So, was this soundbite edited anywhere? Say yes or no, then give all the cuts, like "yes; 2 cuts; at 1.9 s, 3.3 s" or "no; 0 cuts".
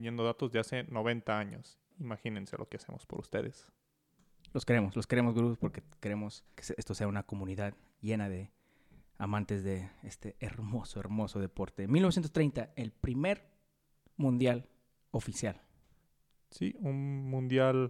yes; 1 cut; at 6.6 s